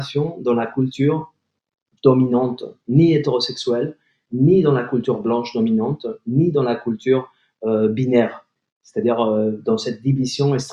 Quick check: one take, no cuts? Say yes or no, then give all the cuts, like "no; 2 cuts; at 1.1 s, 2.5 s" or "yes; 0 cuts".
yes; 0 cuts